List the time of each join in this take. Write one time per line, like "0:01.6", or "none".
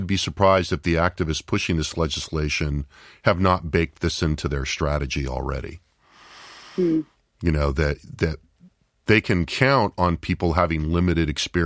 none

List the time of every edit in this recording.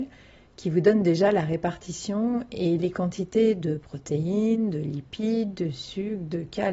0:05.6

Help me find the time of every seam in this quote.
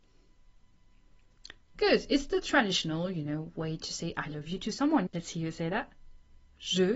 0:01.7
0:05.1

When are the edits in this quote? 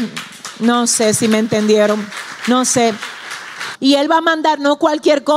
0:03.7

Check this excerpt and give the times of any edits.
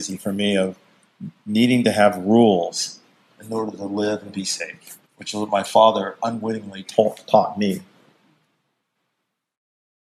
0:05.0

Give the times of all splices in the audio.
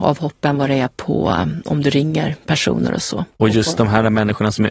0:03.3

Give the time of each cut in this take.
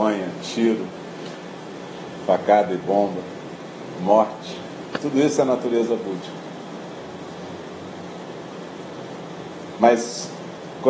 none

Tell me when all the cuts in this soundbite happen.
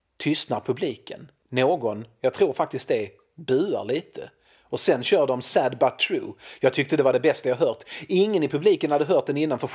none

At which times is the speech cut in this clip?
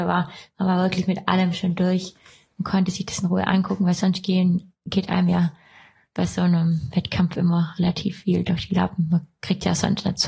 none

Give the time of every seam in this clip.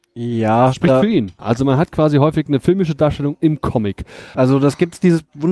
0:01.4
0:04.3

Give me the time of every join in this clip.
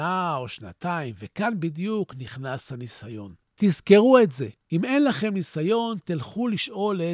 none

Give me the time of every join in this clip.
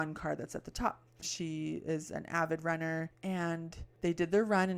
0:01.2

